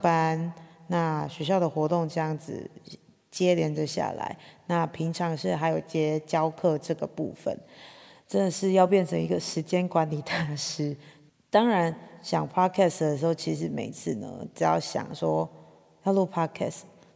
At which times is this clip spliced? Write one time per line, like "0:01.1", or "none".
none